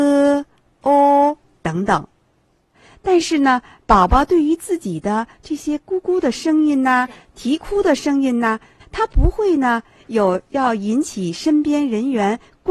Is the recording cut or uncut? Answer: cut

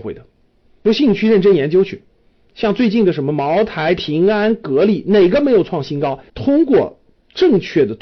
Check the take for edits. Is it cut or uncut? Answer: cut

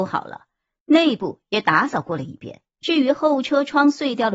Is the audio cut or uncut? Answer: cut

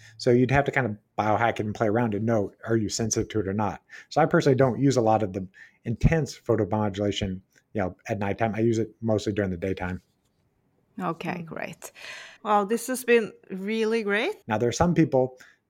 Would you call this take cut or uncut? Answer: cut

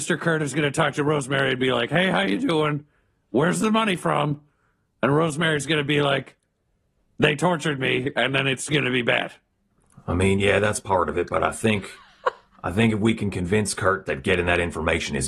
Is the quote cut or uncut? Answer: uncut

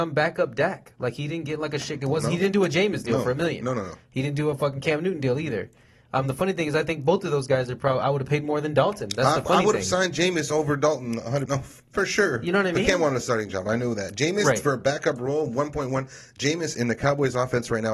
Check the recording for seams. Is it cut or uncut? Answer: cut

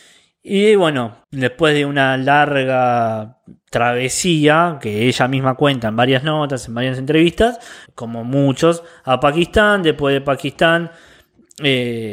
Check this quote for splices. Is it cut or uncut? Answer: cut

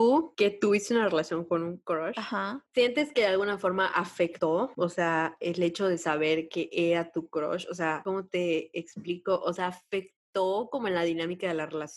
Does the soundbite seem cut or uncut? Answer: uncut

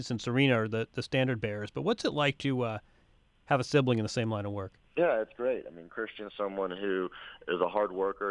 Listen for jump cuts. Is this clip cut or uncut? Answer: cut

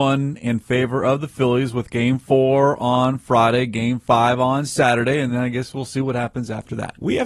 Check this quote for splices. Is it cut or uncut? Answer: uncut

